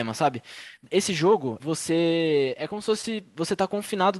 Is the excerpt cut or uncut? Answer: cut